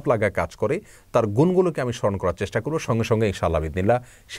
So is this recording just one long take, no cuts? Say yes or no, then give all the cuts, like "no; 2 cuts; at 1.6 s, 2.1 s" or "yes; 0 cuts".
yes; 0 cuts